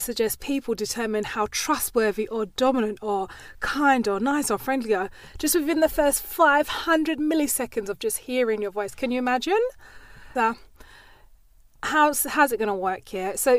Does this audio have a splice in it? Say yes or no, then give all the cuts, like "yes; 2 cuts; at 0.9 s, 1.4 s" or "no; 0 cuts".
yes; 1 cut; at 10.3 s